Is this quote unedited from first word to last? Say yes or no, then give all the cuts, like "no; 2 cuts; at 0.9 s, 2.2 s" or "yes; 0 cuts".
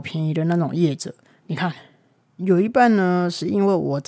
no; 1 cut; at 2.3 s